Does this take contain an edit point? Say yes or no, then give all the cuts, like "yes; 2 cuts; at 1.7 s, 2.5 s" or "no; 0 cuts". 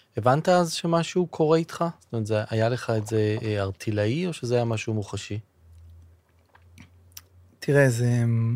no; 0 cuts